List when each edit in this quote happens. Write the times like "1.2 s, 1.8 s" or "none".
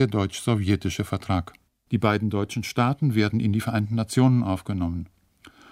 1.9 s